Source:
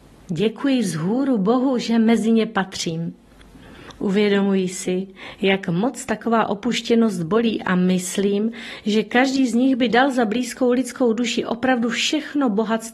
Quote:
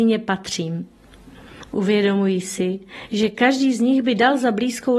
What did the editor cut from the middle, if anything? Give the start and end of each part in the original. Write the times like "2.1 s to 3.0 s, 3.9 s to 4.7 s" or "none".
5.4 s to 8.8 s

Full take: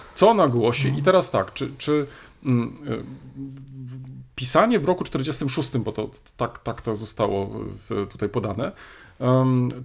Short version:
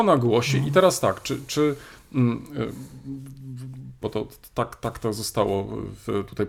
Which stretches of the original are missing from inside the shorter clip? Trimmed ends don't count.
4.3 s to 5.8 s

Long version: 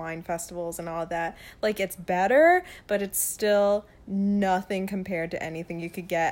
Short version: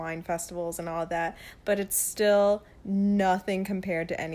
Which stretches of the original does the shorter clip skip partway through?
1.6 s to 2.8 s

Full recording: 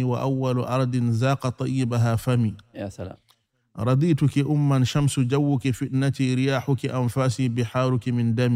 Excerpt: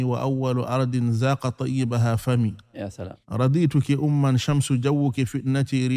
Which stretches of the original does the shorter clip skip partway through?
3.2 s to 3.7 s

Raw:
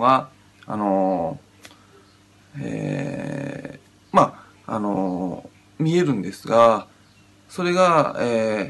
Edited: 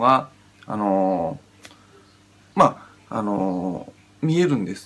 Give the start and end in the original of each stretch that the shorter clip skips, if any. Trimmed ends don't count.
2.5 s to 4.1 s

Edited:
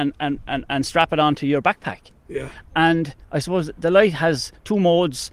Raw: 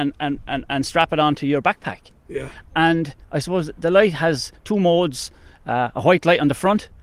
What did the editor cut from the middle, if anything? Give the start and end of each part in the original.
none

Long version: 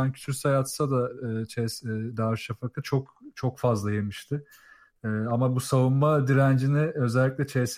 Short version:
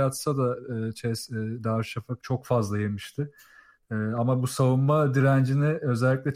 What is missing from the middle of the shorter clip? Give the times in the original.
2.7 s to 3.3 s

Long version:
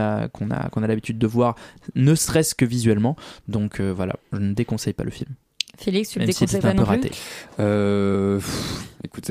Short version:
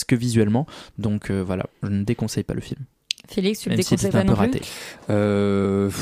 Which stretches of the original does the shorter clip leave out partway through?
none

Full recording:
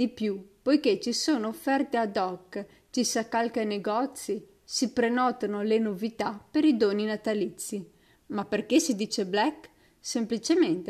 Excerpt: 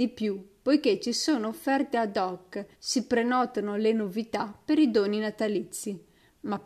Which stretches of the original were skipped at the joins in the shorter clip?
2.7 s to 4.6 s

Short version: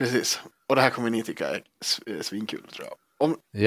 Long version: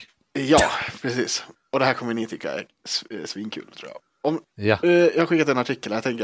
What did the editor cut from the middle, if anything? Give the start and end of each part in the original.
none

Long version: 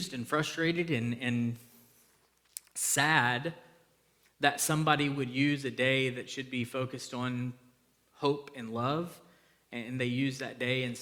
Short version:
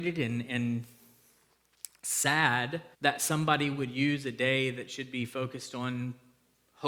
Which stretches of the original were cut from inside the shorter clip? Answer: 3.7 s to 4.3 s

